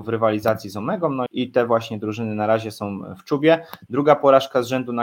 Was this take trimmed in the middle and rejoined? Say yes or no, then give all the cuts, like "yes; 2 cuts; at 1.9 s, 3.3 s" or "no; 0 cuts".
yes; 1 cut; at 1.3 s